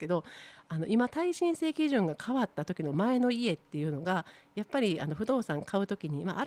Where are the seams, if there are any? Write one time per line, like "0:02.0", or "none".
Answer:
none